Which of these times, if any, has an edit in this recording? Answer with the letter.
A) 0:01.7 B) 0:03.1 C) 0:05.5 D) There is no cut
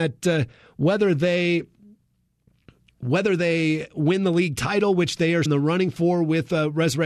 C